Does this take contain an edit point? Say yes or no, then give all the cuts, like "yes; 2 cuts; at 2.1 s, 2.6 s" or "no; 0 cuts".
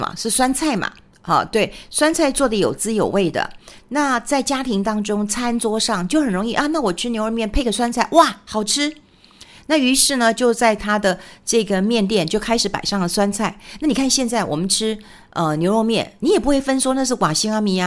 no; 0 cuts